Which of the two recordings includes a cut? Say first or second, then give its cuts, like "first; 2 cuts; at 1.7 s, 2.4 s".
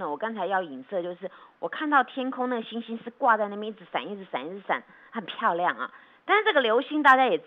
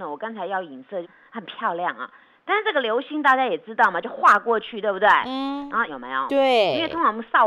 second; 2 cuts; at 1.0 s, 5.9 s